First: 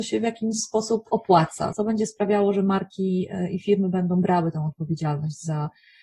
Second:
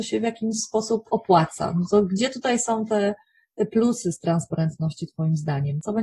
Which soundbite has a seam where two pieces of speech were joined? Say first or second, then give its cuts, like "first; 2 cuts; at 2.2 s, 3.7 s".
first; 1 cut; at 1.7 s